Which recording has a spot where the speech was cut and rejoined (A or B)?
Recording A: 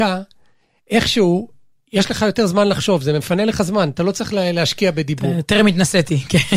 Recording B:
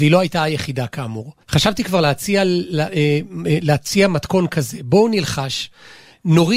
B